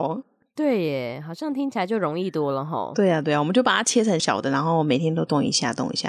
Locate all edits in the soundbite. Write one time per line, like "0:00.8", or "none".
0:04.2